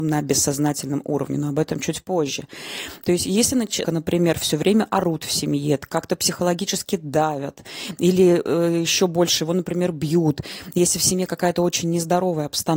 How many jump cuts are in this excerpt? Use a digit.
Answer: 1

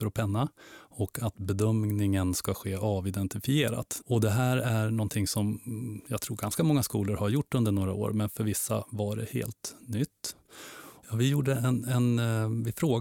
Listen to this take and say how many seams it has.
2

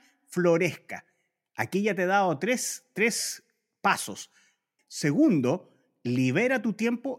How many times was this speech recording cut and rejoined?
1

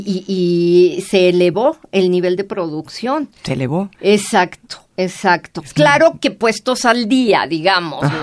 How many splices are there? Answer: 1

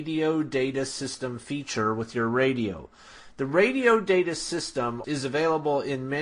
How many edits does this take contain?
1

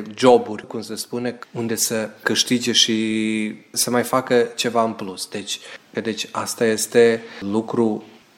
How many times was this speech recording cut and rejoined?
2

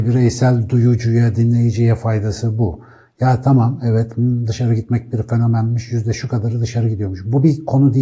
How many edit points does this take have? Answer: 0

